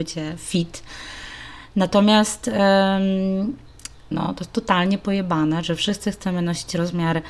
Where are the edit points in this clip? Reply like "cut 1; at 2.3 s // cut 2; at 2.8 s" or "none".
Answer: cut 1; at 4.1 s // cut 2; at 5.6 s